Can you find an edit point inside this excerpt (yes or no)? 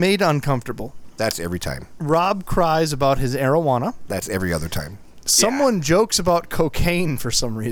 no